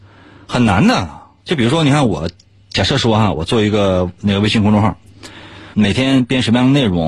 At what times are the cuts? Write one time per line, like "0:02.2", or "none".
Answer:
0:05.7

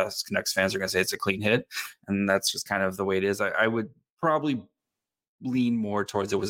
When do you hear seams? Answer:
none

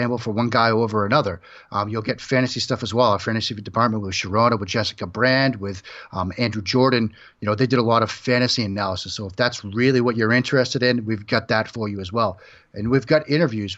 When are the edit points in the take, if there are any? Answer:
none

